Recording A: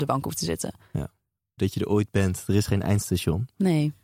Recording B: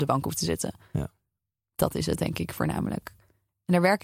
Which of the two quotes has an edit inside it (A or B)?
A